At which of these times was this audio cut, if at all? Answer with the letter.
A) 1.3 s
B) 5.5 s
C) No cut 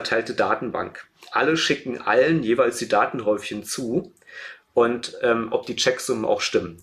B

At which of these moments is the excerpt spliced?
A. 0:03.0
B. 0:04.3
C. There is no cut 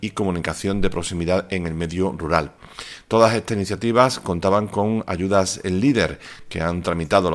C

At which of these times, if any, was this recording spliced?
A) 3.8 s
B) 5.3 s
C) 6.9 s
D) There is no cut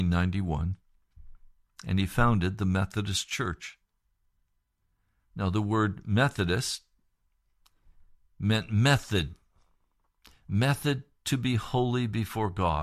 D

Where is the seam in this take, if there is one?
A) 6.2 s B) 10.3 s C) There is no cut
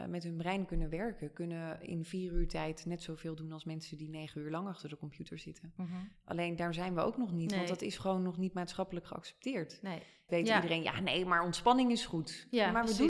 B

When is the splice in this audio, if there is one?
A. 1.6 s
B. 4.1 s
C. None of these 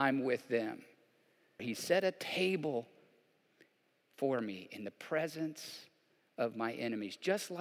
A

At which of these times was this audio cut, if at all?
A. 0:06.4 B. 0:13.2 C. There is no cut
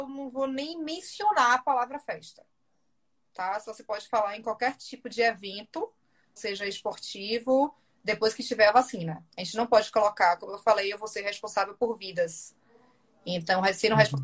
A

